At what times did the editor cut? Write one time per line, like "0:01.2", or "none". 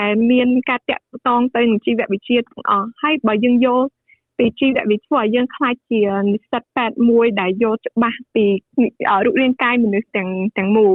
none